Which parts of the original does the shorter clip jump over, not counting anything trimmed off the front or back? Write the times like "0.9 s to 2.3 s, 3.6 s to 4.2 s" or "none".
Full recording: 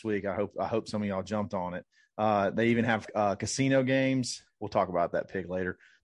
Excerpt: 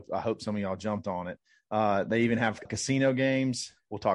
3.1 s to 3.4 s